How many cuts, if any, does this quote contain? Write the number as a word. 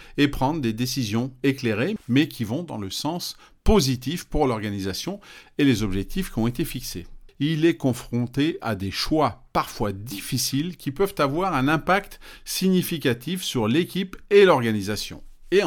two